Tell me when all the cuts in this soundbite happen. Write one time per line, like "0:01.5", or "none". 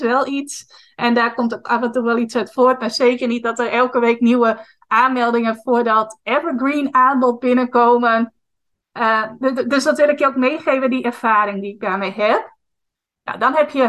none